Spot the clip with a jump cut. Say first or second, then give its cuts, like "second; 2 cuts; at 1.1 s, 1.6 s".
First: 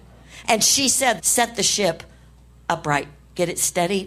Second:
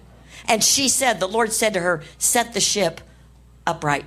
first; 1 cut; at 1.2 s